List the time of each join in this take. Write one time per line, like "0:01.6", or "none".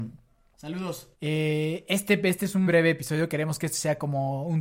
0:01.1
0:02.7